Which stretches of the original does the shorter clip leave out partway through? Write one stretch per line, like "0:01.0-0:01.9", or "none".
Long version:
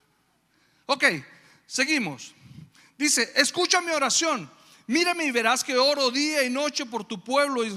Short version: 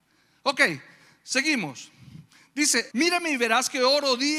0:03.3-0:04.8